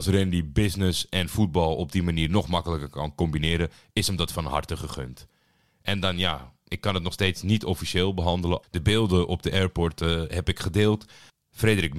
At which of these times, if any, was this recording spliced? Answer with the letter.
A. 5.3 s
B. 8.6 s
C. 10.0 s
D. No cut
B